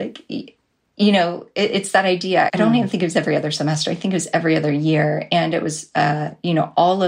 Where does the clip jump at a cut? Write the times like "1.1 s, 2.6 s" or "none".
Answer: 2.5 s

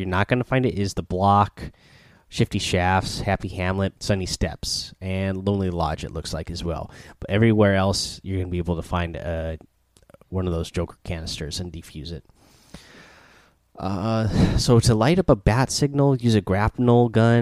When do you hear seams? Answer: 4.0 s

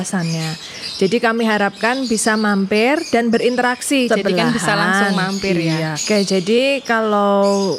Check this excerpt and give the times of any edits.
4.1 s, 6.0 s

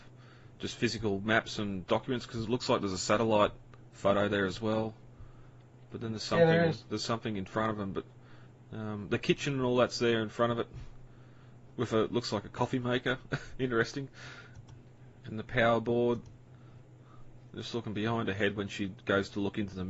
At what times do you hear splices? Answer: none

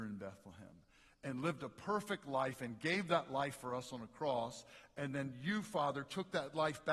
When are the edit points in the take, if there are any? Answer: none

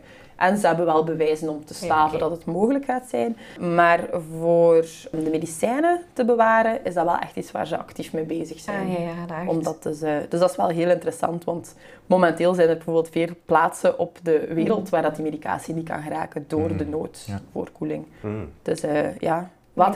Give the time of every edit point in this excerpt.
none

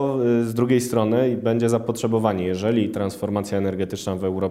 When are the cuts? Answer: none

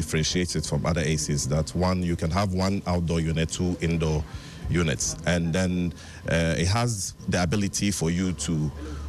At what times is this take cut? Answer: 3.5 s

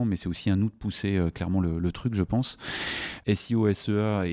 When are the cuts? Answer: 3.2 s

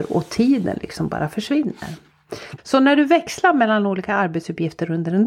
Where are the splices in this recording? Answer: 2.6 s

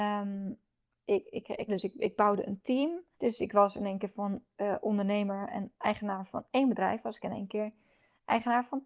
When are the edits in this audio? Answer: 1.7 s, 3.1 s

